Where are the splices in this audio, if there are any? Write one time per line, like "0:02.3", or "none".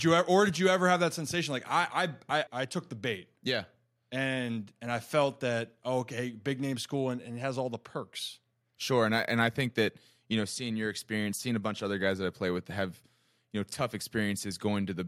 0:02.5